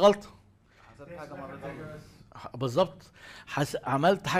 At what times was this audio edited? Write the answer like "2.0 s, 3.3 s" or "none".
none